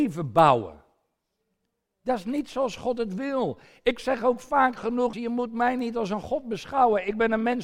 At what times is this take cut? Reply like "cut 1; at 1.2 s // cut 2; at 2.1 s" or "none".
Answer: cut 1; at 5.1 s